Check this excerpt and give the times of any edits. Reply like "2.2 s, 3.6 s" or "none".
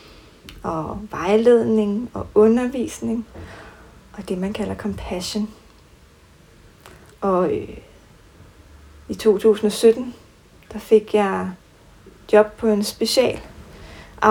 7.1 s